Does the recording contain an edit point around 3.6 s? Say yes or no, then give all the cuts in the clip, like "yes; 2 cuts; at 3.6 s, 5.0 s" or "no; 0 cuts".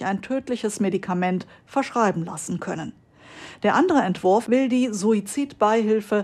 no; 0 cuts